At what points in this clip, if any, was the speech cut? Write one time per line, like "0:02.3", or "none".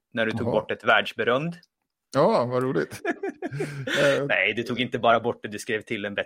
0:03.0